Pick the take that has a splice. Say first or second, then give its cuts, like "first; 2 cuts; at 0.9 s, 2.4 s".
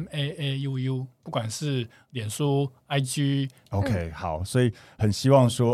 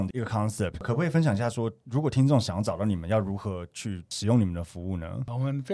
first; 1 cut; at 3.7 s